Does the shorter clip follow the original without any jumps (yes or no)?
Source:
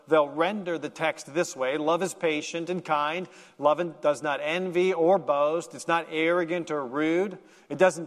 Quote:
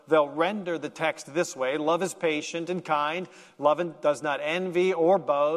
yes